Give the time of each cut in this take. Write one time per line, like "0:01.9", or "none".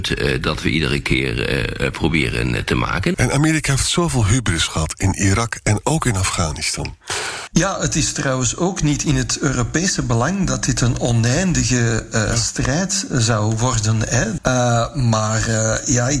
0:03.1
0:07.5
0:14.4